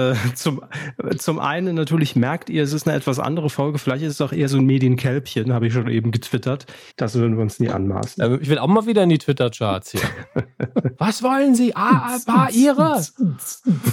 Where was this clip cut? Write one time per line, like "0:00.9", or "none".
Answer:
0:06.9
0:10.9